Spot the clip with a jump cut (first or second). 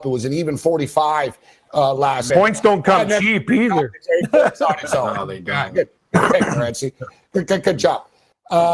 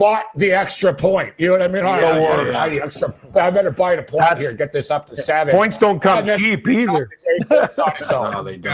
first